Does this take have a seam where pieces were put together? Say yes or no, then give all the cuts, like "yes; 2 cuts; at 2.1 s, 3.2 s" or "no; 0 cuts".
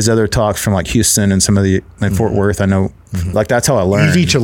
yes; 1 cut; at 3.3 s